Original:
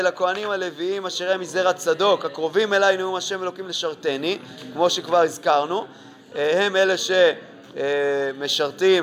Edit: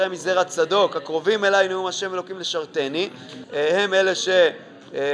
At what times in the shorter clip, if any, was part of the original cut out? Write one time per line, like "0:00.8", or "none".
0:03.4